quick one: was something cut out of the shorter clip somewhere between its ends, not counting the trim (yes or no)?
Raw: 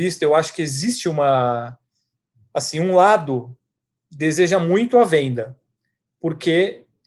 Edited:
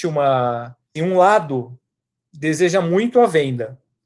yes